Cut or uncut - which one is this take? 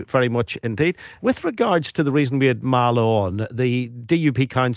cut